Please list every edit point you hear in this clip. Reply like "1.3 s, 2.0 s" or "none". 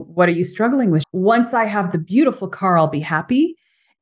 1.0 s